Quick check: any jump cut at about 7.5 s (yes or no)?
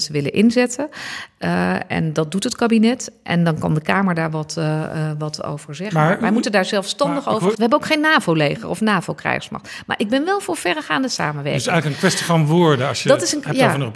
yes